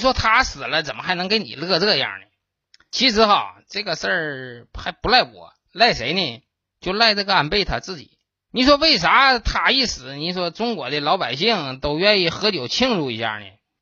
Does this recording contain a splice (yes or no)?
no